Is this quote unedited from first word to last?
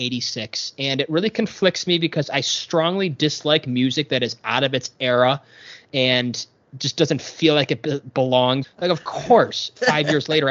no; 1 cut; at 8.6 s

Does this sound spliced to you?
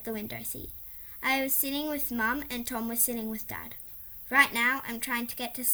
no; 0 cuts

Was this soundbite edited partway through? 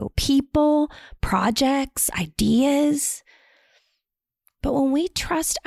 no; 0 cuts

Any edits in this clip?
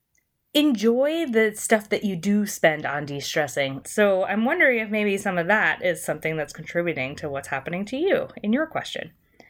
yes; 1 cut; at 3.8 s

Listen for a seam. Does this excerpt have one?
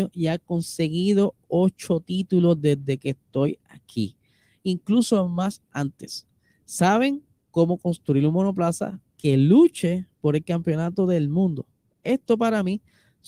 no; 0 cuts

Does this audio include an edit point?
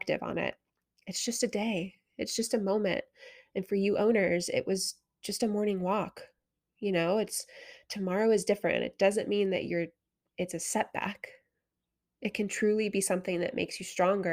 no; 0 cuts

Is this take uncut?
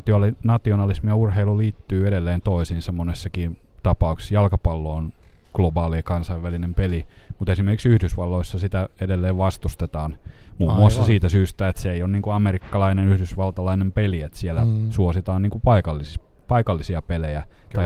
yes; 0 cuts

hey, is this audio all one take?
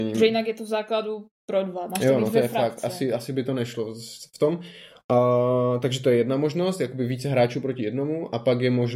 yes; 0 cuts

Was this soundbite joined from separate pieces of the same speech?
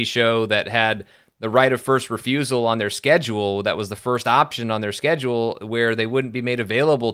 no; 0 cuts

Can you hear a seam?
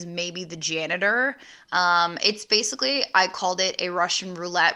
yes; 1 cut; at 1.6 s

